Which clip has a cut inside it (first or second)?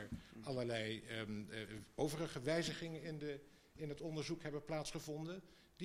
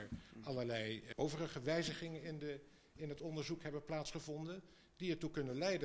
second